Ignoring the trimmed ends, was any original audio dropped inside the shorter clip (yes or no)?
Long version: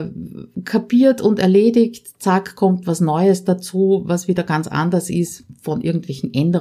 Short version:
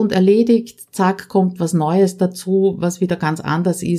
no